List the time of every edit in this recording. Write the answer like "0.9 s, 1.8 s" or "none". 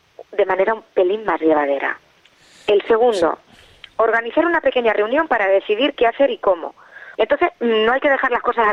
7.2 s